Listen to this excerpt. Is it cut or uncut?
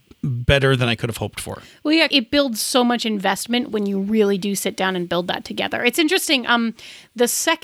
cut